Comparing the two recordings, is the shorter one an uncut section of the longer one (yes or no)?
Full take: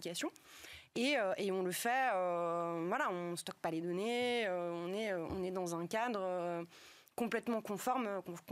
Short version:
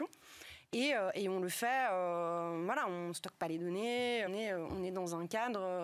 no